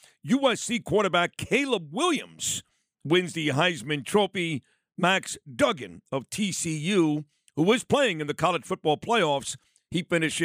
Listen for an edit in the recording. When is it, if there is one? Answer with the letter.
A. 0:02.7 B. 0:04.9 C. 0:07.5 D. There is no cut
D